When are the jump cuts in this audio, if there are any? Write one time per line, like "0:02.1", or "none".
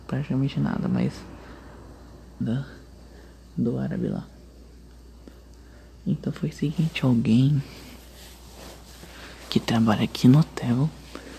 0:02.4

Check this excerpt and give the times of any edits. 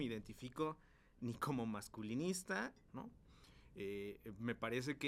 0:02.9

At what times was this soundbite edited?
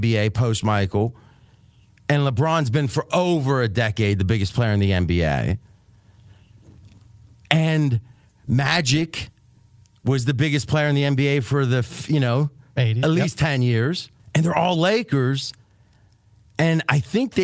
0:14.2

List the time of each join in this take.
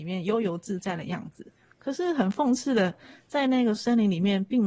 none

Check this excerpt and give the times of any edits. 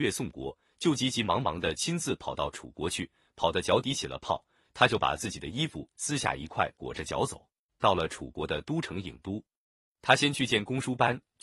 0:04.6
0:07.7

